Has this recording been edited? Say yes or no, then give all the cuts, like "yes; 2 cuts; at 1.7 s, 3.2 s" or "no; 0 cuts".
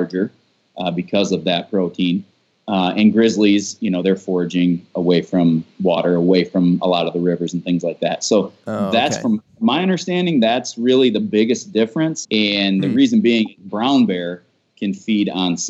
yes; 1 cut; at 12.2 s